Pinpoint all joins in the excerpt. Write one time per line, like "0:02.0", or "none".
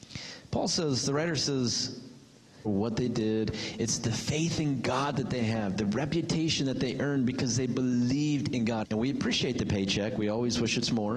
0:02.7
0:08.8